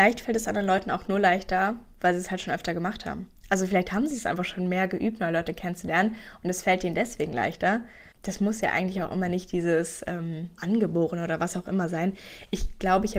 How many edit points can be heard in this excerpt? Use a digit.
2